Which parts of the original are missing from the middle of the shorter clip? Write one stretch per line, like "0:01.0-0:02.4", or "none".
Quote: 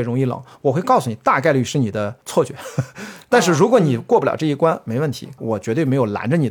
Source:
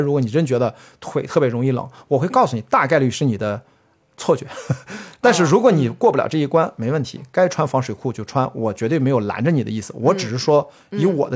0:03.7-0:04.1
0:07.3-0:08.5